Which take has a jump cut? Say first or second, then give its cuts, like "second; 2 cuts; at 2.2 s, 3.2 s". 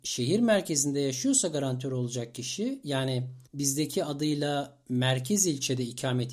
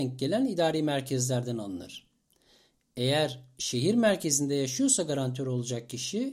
first; 1 cut; at 3.5 s